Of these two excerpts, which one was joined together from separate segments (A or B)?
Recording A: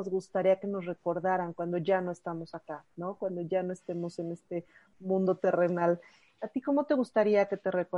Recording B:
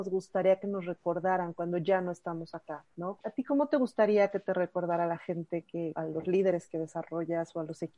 B